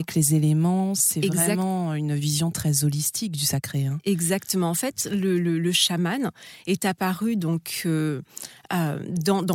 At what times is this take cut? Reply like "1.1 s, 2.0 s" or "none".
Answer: none